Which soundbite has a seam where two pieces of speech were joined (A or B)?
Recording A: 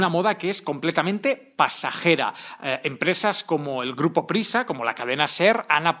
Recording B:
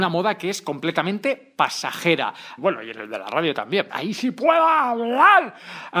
B